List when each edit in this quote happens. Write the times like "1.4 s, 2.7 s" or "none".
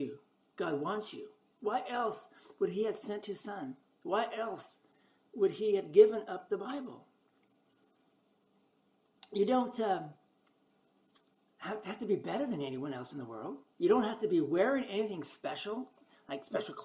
none